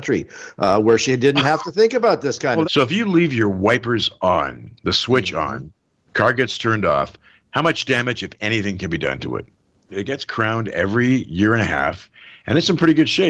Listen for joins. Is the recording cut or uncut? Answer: cut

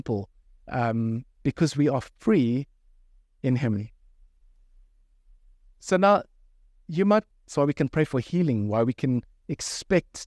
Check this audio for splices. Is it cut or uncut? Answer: cut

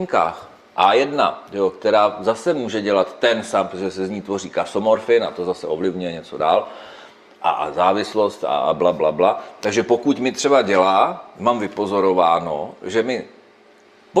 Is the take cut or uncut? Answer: uncut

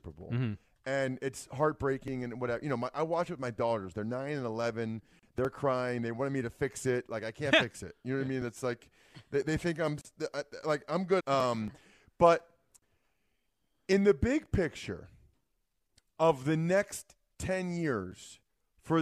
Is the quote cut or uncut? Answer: cut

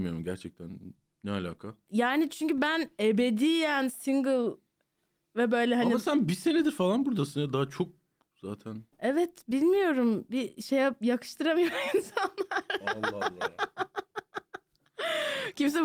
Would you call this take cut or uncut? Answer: cut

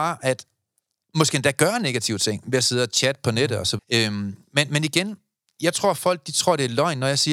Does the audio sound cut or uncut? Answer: cut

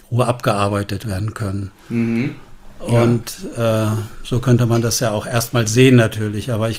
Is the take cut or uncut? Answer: uncut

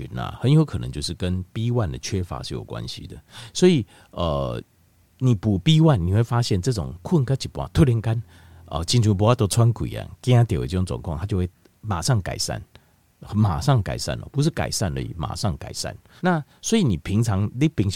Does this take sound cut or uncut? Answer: cut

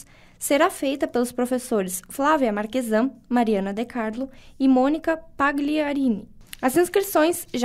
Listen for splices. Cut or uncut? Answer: uncut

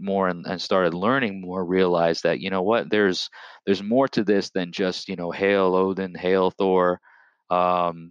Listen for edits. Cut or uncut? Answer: uncut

